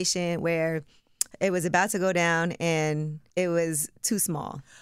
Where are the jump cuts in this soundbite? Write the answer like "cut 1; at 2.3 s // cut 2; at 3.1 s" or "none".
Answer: cut 1; at 3.3 s

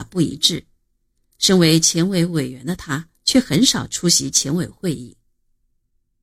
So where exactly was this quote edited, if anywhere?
none

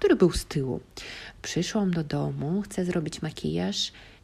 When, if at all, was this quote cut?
none

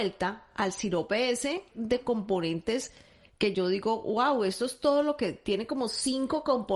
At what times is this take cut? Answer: cut 1; at 1.7 s

